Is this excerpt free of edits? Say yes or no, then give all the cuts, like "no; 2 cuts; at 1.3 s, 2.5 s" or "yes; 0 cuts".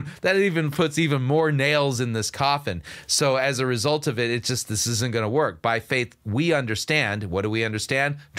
yes; 0 cuts